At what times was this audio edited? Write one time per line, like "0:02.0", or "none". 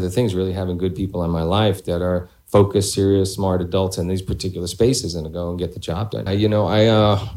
0:06.3